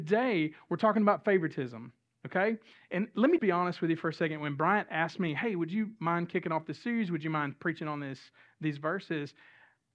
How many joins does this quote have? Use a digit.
1